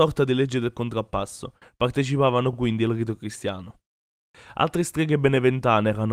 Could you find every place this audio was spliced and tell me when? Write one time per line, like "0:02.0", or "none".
none